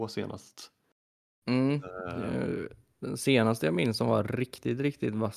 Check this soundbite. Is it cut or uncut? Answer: uncut